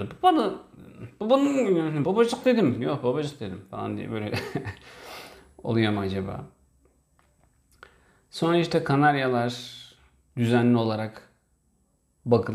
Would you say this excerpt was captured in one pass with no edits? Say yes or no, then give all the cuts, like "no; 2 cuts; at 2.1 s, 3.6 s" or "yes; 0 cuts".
no; 1 cut; at 2.0 s